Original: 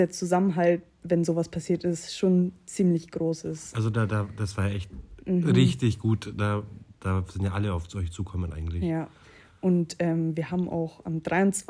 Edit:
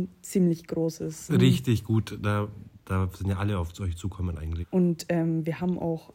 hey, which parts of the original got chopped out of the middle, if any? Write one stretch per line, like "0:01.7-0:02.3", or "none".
0:03.7-0:05.4
0:08.8-0:09.5